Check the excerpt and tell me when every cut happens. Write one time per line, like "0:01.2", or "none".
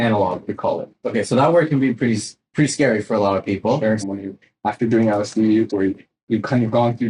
0:04.0
0:05.7